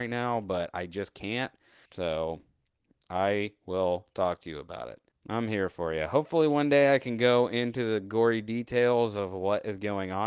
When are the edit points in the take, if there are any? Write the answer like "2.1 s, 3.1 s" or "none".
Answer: 1.9 s, 5.1 s